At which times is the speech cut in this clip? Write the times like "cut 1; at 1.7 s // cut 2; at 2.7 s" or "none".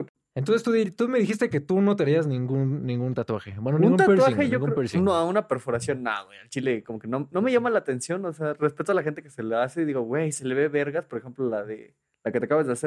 none